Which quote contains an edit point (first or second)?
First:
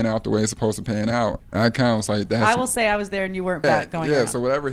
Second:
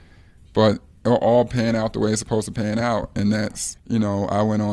first